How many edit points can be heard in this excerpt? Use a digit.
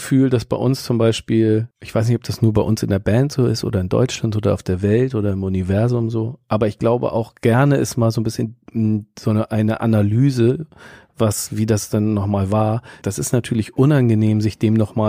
2